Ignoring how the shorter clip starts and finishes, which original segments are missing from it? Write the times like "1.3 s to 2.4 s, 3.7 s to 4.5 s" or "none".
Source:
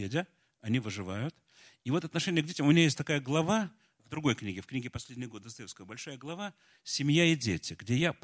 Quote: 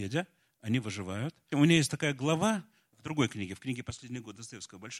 1.5 s to 2.6 s